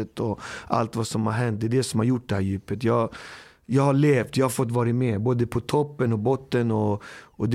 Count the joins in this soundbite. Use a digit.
0